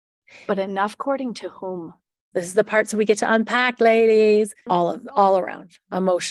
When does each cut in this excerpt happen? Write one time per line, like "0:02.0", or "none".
0:02.3
0:04.7